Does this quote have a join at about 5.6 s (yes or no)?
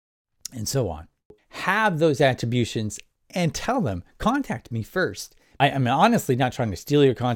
yes